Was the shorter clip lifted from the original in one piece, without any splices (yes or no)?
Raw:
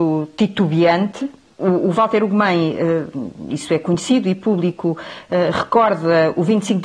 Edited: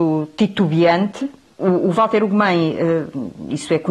yes